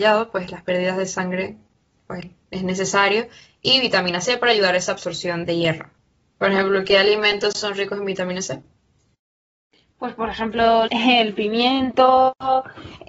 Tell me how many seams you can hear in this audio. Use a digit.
2